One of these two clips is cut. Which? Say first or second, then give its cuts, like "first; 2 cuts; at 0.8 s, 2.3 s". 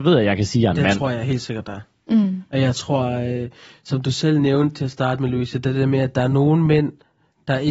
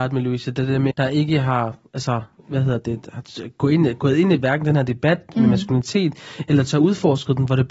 second; 1 cut; at 0.9 s